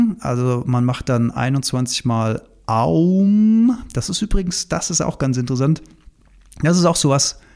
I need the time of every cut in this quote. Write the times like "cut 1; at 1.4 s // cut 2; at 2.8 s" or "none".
none